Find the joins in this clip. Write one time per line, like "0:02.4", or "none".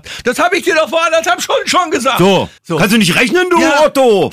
0:02.6